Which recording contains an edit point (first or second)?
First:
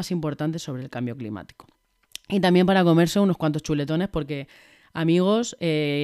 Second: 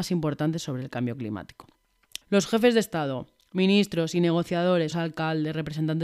second